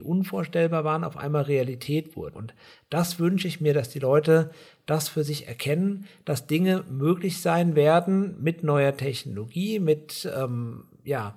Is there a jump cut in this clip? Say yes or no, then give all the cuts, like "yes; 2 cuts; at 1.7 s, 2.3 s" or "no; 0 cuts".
yes; 1 cut; at 2.3 s